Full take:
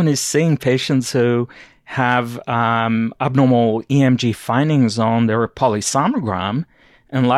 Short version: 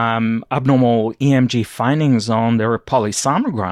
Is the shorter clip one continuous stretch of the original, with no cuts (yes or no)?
yes